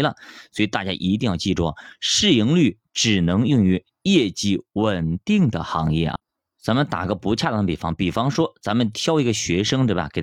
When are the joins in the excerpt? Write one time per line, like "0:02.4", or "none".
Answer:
none